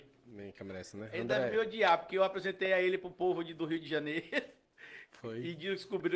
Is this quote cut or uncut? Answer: uncut